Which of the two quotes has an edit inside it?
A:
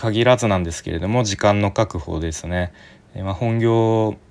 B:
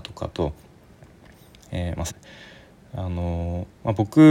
B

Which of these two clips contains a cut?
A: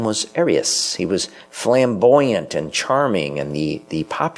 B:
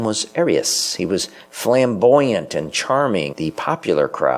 B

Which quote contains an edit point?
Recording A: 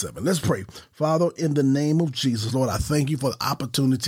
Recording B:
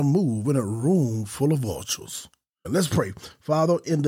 B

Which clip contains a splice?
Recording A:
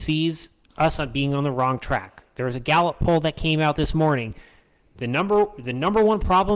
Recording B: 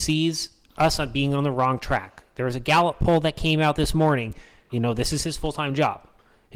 B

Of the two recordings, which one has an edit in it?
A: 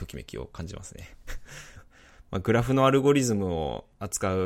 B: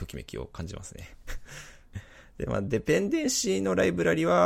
A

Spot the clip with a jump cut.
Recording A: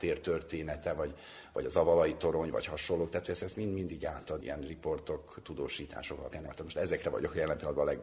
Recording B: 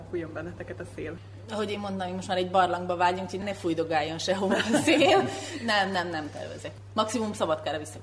A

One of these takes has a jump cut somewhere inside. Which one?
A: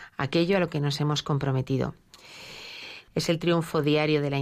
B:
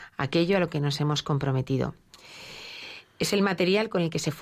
A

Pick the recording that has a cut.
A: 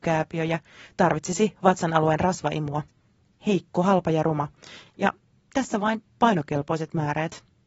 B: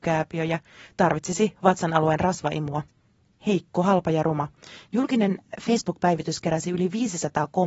B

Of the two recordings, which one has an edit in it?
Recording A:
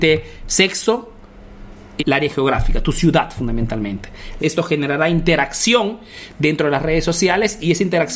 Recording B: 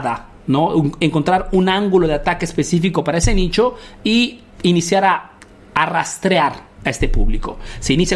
A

